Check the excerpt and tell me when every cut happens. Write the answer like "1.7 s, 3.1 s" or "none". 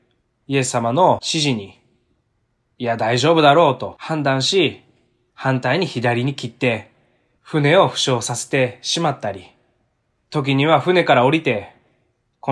none